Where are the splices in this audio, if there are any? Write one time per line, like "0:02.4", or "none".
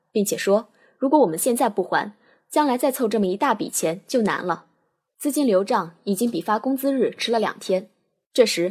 0:05.1